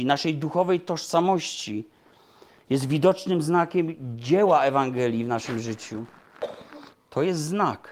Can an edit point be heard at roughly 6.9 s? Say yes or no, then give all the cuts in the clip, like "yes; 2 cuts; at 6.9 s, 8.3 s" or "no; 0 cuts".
yes; 1 cut; at 6.9 s